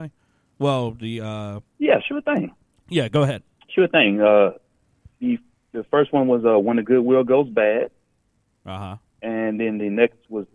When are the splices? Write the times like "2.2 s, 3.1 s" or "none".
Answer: 5.1 s